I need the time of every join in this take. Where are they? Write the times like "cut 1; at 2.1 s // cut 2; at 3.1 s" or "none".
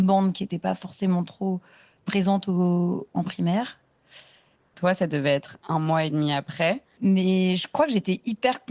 cut 1; at 4.7 s // cut 2; at 7.0 s